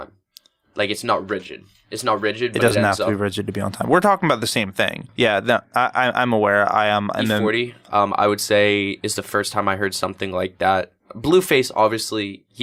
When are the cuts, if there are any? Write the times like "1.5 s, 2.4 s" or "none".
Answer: 5.1 s